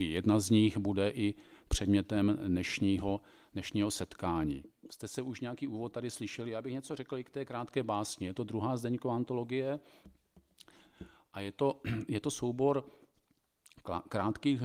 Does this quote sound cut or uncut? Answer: uncut